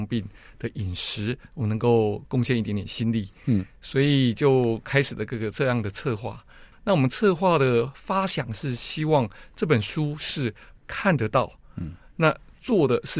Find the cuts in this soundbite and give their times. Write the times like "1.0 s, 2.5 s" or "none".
6.7 s